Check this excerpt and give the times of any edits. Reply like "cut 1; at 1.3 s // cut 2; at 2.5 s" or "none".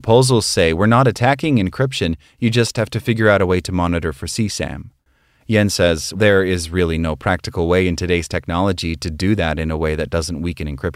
cut 1; at 6.1 s

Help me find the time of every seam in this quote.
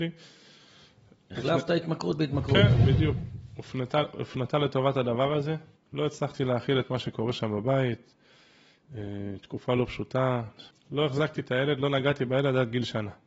cut 1; at 5.8 s // cut 2; at 10.7 s

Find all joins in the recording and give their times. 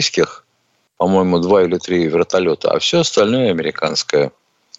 none

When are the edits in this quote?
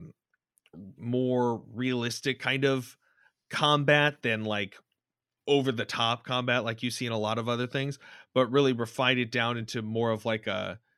cut 1; at 1.0 s

